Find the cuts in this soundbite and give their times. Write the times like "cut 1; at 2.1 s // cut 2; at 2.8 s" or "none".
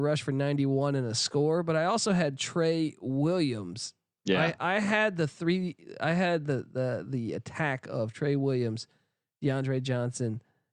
none